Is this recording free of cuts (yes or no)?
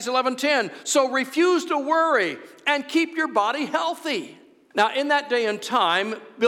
no